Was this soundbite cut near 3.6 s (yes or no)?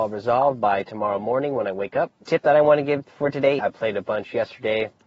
yes